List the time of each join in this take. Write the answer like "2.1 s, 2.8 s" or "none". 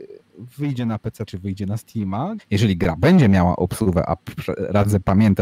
1.3 s, 2.4 s